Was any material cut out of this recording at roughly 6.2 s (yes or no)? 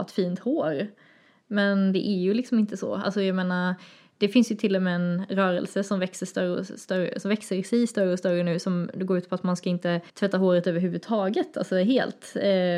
no